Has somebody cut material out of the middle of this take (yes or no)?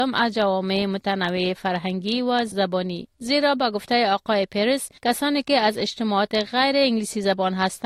yes